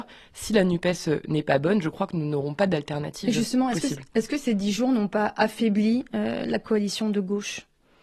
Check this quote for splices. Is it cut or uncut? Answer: uncut